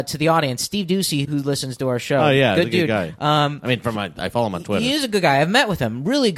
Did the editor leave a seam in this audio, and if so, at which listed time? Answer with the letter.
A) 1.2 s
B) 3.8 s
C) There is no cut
A